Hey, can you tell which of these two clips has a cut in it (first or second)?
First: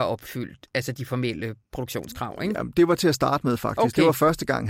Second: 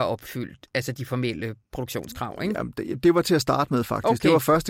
first